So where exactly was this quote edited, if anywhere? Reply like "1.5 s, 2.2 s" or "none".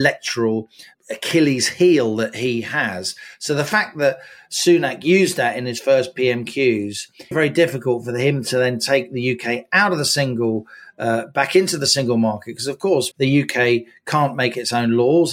7.3 s, 13.1 s